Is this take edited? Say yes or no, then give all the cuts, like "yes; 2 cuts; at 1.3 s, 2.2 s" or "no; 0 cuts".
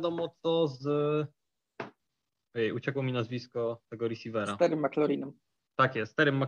no; 0 cuts